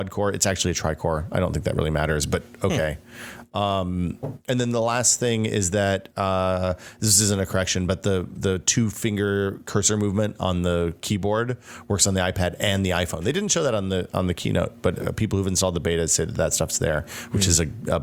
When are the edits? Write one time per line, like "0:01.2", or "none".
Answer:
none